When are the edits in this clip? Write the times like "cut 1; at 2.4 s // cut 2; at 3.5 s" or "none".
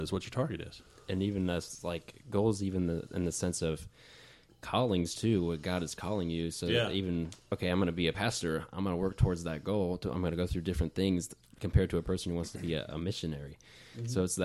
none